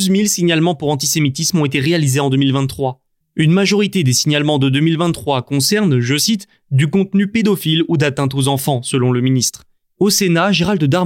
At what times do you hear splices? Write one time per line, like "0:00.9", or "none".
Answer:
0:03.2
0:09.9